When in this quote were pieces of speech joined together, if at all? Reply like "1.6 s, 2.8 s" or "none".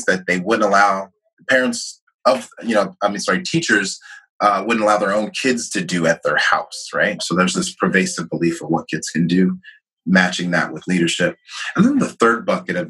7.2 s